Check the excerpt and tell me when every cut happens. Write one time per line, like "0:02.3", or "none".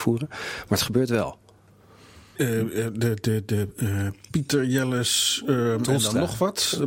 0:02.3